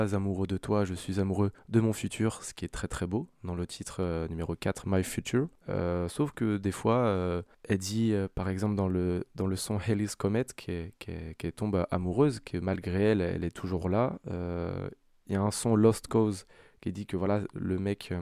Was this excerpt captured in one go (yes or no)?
yes